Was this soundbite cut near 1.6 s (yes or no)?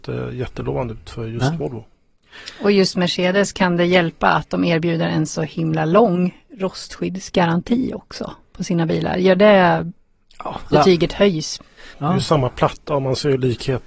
no